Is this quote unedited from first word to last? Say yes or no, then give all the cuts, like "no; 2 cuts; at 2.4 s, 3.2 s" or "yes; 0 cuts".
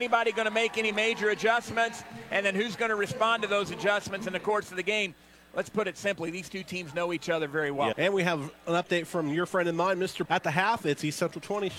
no; 2 cuts; at 7.9 s, 10.2 s